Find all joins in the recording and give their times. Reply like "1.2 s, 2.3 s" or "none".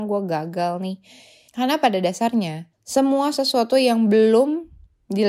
1.5 s, 2.7 s